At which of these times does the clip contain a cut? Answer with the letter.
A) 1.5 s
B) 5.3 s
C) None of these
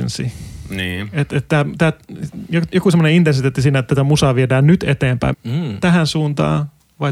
B